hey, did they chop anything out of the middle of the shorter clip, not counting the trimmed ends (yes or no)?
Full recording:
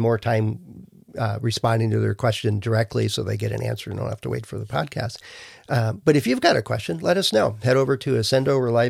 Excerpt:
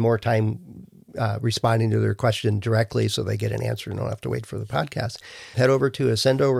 yes